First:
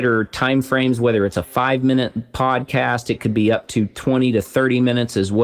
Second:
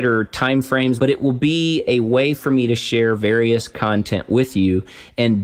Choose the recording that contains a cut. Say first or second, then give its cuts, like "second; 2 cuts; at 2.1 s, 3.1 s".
second; 1 cut; at 1.0 s